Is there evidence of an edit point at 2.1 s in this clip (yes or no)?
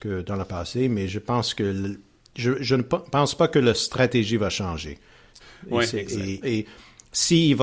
no